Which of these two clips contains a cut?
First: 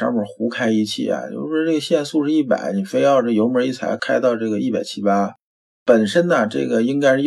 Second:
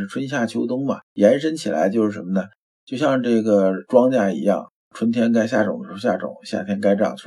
second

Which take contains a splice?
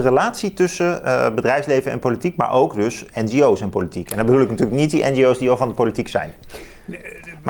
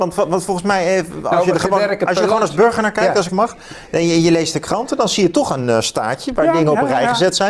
second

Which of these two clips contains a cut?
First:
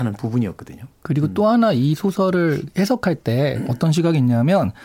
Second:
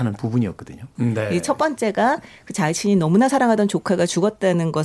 second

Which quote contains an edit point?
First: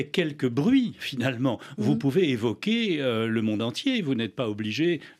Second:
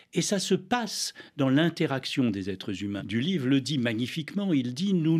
second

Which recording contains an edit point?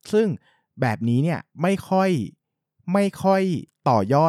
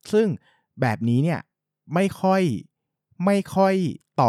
first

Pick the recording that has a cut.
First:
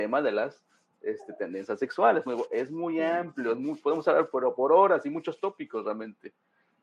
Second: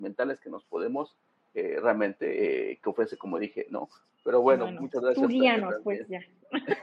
second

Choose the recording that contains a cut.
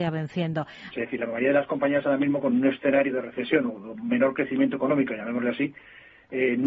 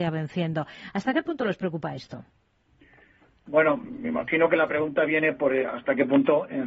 first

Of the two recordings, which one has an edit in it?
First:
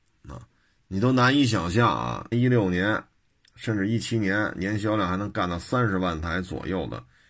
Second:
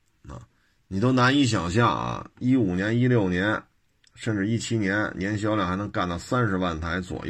first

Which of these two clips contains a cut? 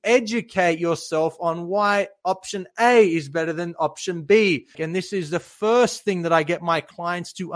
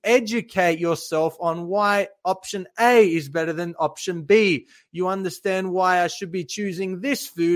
first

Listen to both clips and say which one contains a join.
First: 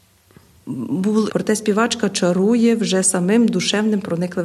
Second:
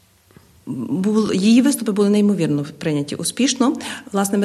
first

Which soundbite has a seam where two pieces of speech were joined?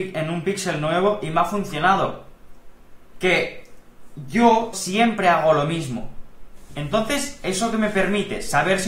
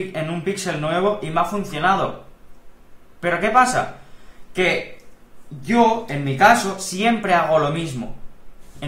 first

